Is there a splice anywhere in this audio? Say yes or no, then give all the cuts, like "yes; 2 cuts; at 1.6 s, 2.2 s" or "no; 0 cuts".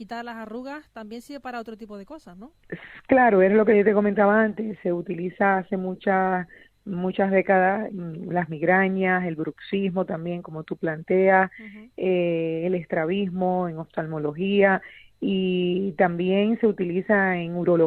yes; 1 cut; at 7.9 s